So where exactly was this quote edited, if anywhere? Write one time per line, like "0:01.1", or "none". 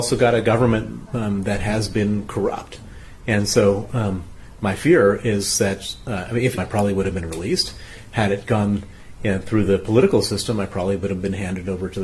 0:06.6